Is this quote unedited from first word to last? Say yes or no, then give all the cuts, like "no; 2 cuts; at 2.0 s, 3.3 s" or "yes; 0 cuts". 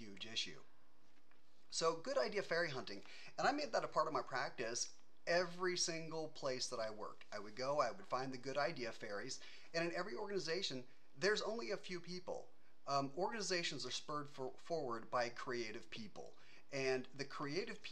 yes; 0 cuts